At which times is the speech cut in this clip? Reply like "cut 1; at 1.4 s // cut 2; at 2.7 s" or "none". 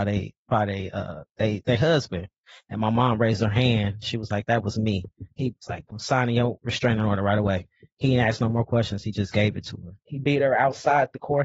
cut 1; at 5.9 s // cut 2; at 10.0 s